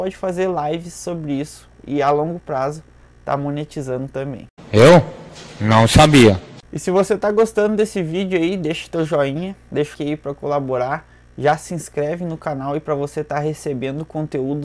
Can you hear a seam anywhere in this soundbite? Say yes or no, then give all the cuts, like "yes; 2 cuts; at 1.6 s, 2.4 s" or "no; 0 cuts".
yes; 1 cut; at 9.9 s